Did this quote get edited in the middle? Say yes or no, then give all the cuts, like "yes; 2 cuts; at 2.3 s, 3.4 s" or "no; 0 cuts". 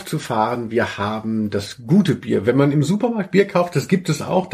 no; 0 cuts